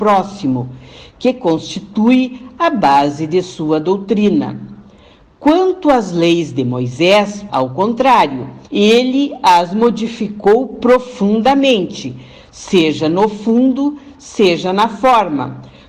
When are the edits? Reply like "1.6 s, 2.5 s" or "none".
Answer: 7.5 s, 8.7 s